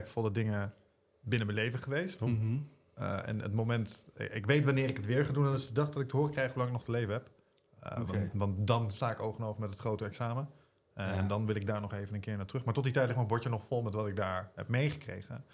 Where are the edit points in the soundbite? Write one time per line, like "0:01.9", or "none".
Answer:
none